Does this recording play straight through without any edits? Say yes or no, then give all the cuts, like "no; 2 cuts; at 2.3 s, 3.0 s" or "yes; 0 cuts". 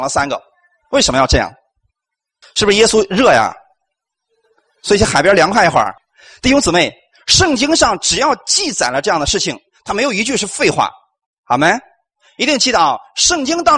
yes; 0 cuts